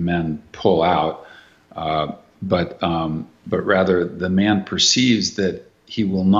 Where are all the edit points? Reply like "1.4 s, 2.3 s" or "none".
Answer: none